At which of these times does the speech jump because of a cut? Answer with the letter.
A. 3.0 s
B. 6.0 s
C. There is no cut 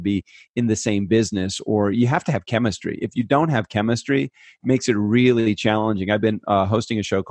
C